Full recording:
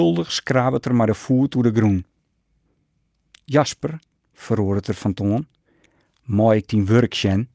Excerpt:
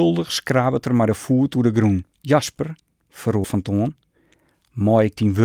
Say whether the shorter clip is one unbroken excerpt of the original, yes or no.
no